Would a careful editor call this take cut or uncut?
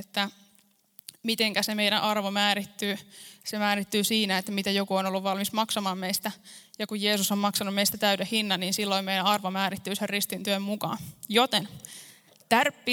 uncut